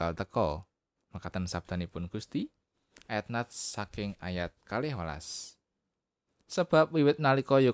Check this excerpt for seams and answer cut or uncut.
cut